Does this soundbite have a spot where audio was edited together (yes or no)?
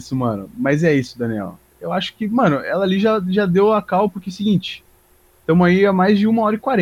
no